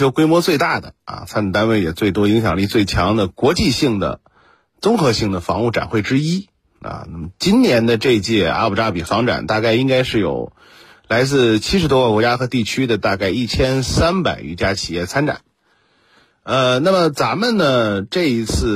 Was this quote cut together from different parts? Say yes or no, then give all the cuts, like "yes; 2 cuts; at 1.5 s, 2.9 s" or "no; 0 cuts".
no; 0 cuts